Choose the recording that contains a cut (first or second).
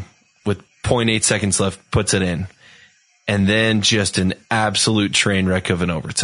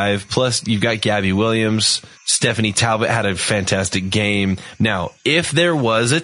second